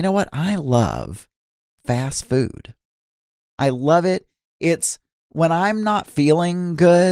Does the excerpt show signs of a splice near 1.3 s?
no; 1 cut; at 3.4 s

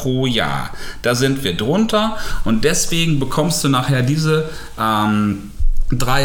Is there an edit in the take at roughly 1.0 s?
no; 0 cuts

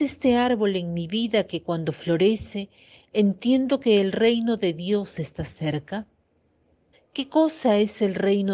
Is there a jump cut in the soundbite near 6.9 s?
yes; 1 cut; at 6.9 s

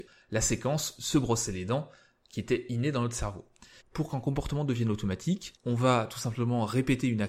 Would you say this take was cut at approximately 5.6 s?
no; 1 cut; at 3.8 s

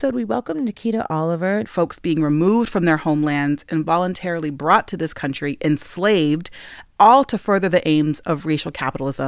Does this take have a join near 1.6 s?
yes; 1 cut; at 1.6 s

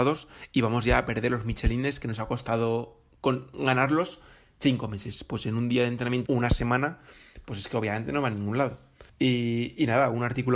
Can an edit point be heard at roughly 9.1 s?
yes; 2 cuts; at 6.3 s, 9.1 s

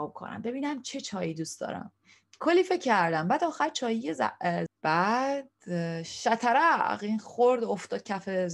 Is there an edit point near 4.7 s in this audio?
yes; 1 cut; at 4.7 s

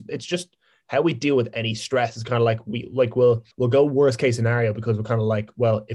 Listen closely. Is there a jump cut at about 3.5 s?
yes; 1 cut; at 3.5 s

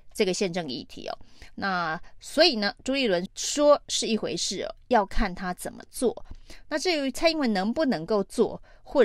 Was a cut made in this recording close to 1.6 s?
no; 1 cut; at 3.3 s

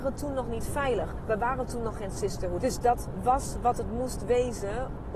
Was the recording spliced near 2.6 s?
yes; 1 cut; at 2.6 s

